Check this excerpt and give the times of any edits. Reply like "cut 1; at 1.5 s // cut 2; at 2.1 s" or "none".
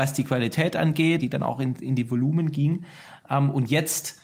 cut 1; at 1.2 s